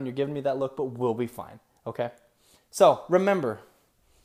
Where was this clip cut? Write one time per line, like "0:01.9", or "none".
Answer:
none